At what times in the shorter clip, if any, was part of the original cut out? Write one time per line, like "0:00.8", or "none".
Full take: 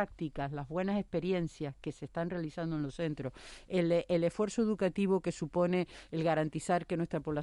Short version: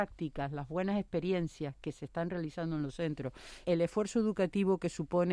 0:03.6